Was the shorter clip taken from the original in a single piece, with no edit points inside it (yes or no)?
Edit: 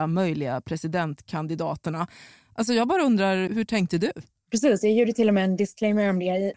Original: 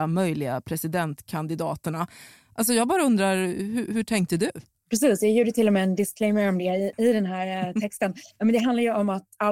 no